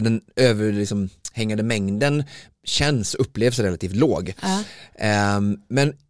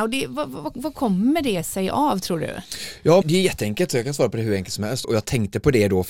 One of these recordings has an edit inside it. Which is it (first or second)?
second